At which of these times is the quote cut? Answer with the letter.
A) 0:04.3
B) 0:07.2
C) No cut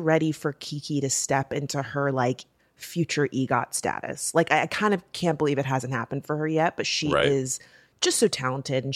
C